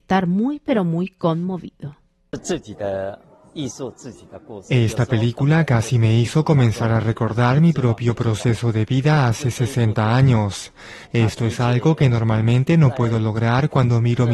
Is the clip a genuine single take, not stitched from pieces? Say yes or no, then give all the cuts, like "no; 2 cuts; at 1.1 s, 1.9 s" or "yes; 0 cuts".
no; 1 cut; at 11.1 s